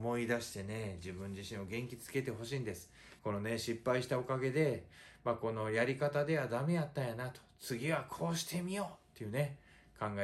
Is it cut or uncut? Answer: cut